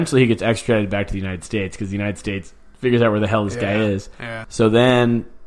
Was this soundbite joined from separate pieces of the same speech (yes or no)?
yes